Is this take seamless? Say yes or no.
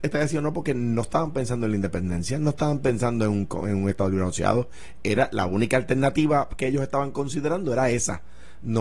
yes